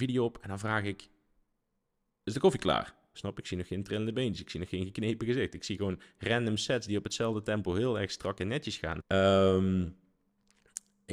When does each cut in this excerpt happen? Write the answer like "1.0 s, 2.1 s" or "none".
3.1 s, 9.0 s